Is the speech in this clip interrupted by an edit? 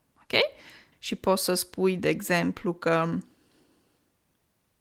yes; 1 cut; at 0.9 s

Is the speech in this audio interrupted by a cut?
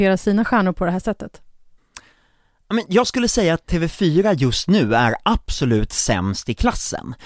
no; 0 cuts

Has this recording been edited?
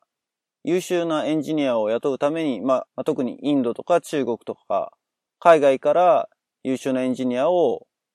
yes; 1 cut; at 2.9 s

